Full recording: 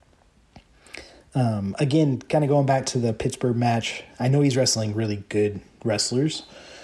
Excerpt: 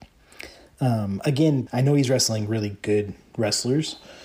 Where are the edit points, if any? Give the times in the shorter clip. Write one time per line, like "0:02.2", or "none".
0:01.7